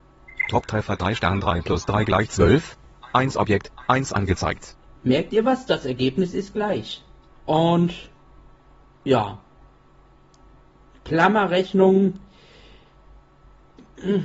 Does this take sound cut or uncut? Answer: cut